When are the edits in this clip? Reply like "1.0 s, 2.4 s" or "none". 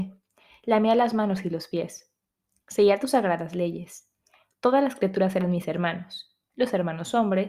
none